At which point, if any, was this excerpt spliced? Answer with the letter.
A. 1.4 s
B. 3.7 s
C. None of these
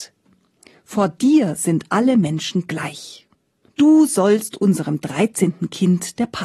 B